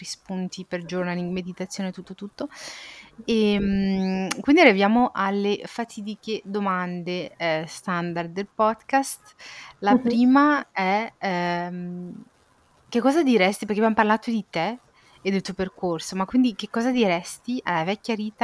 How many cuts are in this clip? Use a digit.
0